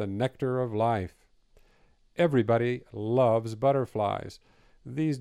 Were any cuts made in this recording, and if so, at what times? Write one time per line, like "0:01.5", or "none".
none